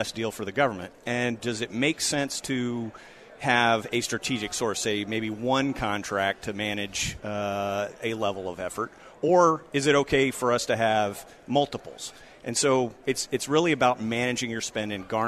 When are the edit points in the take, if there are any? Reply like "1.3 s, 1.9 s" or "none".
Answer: none